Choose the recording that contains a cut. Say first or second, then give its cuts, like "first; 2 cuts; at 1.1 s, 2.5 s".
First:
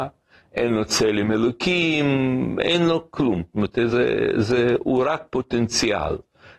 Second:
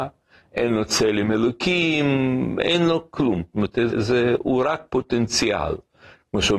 second; 1 cut; at 3.9 s